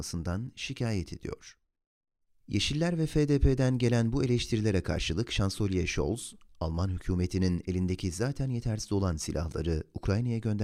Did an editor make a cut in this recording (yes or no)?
no